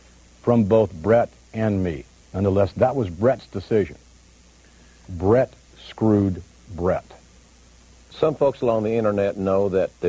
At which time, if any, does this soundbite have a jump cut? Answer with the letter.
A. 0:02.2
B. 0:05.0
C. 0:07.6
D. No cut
A